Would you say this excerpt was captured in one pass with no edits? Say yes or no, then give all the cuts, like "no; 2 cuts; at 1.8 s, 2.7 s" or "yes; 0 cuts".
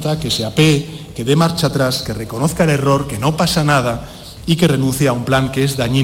yes; 0 cuts